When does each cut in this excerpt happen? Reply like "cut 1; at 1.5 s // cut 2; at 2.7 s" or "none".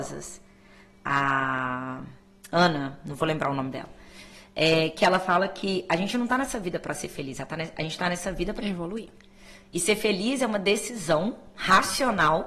cut 1; at 8.6 s